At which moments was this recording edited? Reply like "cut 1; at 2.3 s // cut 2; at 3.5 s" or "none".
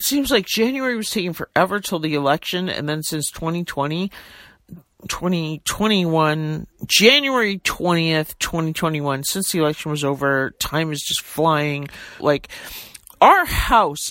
cut 1; at 12.2 s